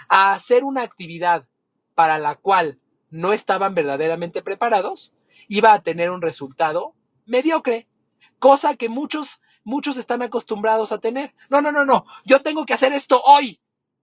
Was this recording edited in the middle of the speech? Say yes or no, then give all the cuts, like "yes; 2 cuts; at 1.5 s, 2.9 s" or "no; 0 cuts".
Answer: no; 0 cuts